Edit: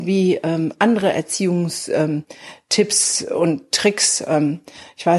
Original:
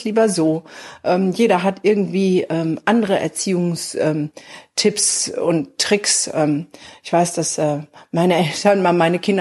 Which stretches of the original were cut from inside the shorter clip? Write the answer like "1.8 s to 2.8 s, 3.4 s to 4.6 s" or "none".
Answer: none